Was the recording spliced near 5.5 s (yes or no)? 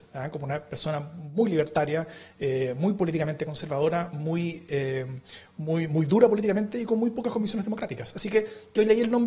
no